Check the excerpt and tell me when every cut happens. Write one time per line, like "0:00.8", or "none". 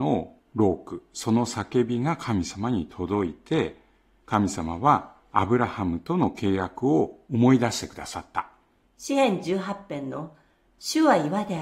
0:08.8